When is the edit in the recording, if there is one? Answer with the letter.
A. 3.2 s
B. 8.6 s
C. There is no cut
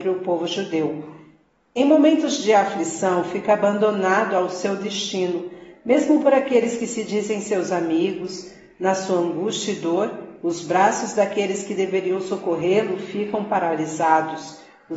C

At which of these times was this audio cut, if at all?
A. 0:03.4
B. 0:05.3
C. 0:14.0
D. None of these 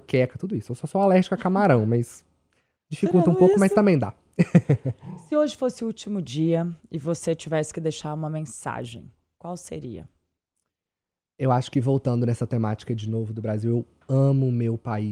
D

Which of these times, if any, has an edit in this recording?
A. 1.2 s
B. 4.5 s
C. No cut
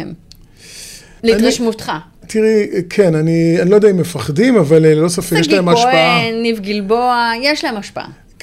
A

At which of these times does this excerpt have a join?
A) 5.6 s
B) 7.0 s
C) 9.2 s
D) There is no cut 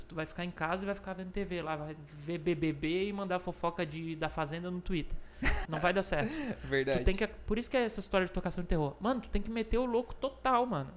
A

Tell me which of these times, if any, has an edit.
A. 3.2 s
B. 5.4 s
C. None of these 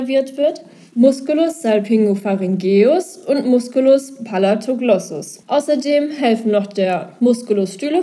B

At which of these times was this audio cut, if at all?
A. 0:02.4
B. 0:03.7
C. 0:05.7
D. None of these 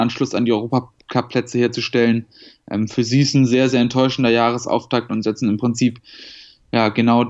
D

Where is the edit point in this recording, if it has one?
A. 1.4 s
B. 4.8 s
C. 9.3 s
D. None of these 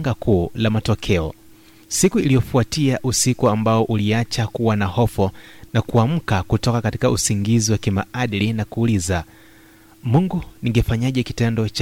D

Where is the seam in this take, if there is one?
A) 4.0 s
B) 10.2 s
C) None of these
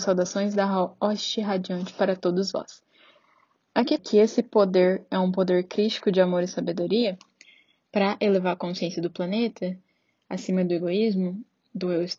A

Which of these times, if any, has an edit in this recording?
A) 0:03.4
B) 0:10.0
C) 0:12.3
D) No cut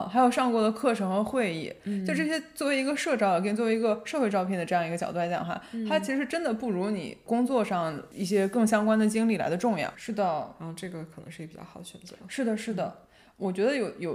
B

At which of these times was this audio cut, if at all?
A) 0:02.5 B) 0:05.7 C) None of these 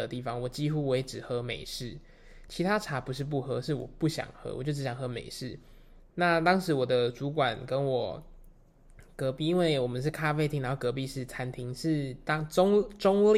C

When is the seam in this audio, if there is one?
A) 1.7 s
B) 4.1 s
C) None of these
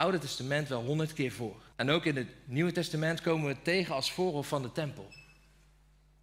A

